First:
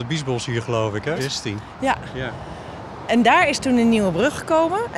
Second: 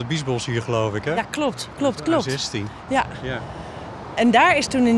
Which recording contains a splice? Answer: first; 1 cut; at 1.2 s

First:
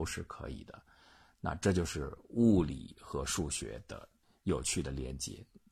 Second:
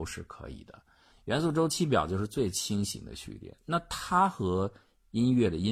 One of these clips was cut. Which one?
second; 1 cut; at 1.1 s

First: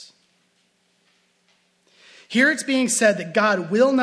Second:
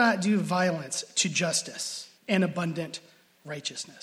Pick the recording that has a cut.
second; 1 cut; at 2.2 s

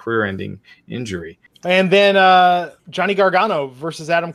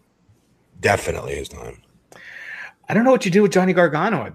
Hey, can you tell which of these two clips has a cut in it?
first; 2 cuts; at 1.5 s, 2.8 s

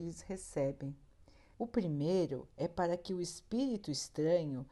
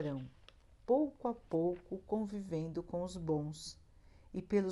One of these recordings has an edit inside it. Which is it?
first; 1 cut; at 1.5 s

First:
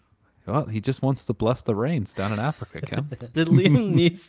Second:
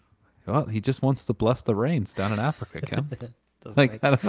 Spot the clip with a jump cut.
first; 1 cut; at 3.3 s

